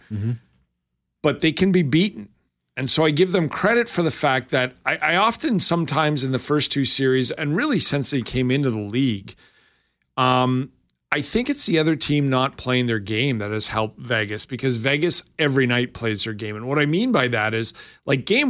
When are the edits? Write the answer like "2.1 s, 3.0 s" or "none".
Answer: none